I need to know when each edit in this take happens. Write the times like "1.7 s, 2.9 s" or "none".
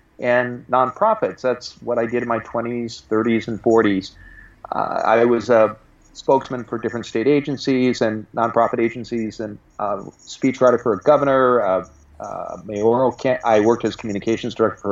none